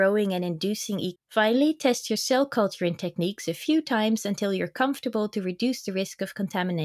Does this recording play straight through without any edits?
no; 1 cut; at 1.2 s

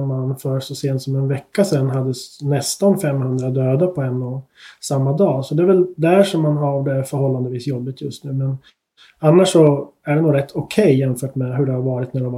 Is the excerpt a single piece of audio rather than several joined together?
yes; 0 cuts

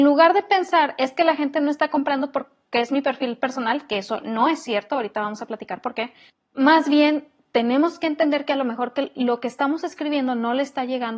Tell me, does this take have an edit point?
no; 0 cuts

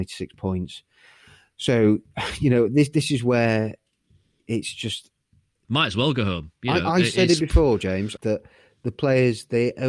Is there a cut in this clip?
yes; 2 cuts; at 5.6 s, 8.2 s

